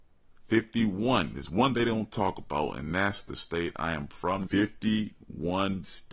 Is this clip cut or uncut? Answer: cut